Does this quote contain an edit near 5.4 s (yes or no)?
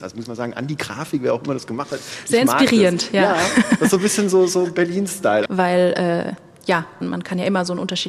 yes